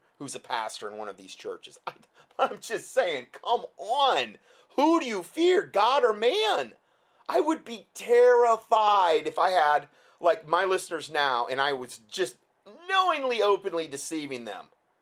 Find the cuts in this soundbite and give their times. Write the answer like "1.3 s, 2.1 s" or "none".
none